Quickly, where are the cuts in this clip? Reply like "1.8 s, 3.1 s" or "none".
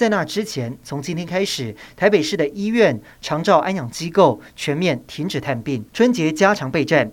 5.9 s

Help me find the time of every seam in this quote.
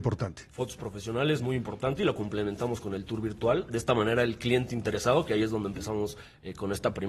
none

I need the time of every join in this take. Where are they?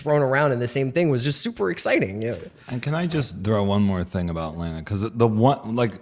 none

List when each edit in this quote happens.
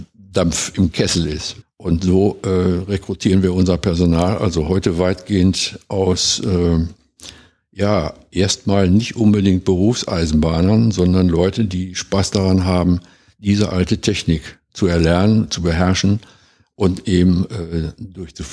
1.6 s

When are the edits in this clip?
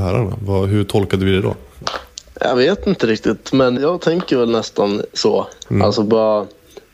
3.8 s, 5.7 s

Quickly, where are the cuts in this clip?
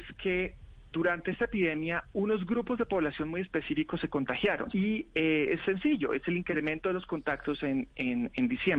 0.9 s, 4.7 s

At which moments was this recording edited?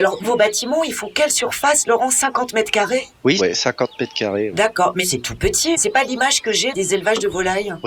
3.4 s

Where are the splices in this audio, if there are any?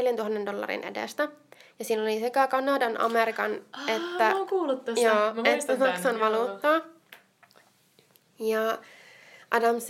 none

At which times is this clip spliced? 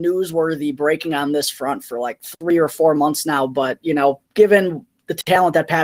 4.3 s

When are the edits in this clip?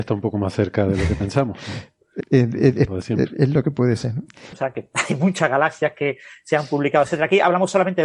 2.2 s, 4.5 s

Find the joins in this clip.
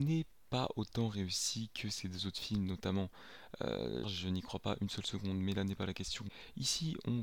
4.0 s

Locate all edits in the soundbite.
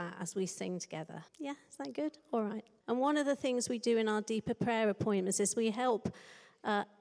1.3 s, 2.8 s

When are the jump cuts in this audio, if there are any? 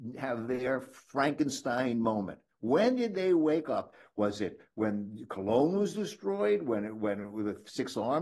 none

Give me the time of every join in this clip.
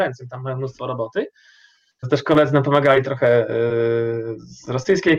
2.0 s, 3.0 s

